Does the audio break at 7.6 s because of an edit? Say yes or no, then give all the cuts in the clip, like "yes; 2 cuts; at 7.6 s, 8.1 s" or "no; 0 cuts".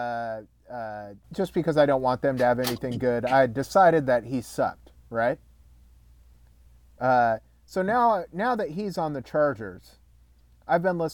no; 1 cut; at 1.2 s